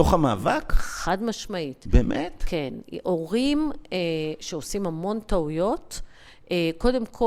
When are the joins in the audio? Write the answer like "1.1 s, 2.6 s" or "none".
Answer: none